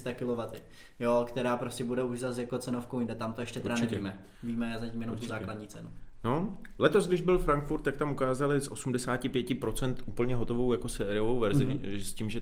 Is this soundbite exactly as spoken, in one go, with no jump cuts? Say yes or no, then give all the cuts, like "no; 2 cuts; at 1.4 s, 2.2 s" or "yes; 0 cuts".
yes; 0 cuts